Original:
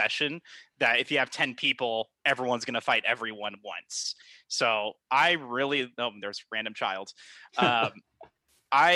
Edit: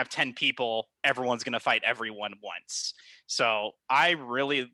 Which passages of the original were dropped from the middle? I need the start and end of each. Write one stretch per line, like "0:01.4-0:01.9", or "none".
none